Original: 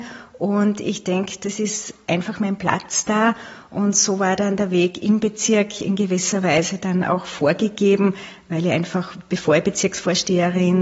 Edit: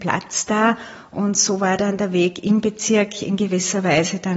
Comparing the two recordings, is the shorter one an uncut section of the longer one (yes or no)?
yes